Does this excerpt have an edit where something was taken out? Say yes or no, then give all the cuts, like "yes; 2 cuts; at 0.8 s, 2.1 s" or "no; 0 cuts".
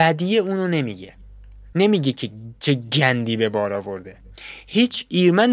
no; 0 cuts